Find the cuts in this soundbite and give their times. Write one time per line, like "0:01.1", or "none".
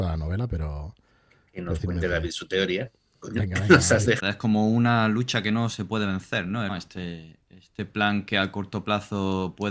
0:04.2
0:06.7